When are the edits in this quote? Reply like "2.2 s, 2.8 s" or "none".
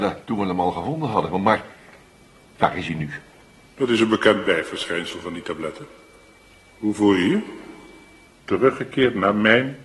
3.7 s, 8.2 s